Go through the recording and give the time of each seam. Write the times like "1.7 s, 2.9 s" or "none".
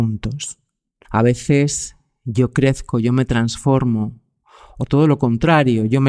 1.0 s